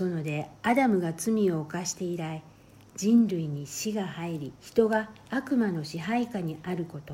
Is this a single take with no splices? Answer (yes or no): no